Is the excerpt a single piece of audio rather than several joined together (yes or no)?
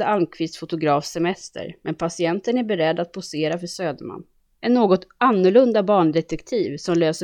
no